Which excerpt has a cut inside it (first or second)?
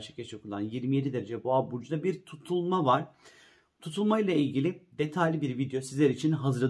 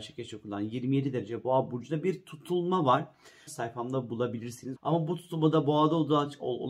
second